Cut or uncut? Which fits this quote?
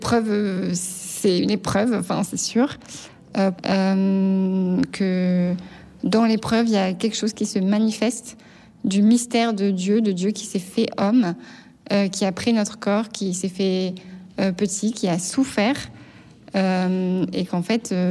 cut